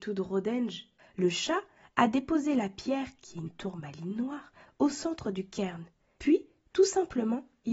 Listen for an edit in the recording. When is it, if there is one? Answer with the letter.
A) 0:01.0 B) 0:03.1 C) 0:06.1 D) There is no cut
A